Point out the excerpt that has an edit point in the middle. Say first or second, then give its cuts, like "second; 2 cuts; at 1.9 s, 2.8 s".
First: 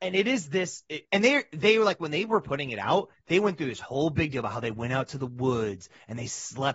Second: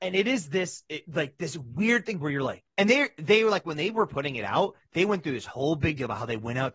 first; 1 cut; at 1.0 s